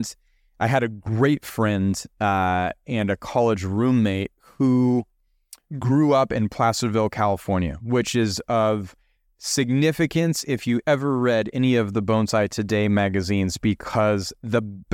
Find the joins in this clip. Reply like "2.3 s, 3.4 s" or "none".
none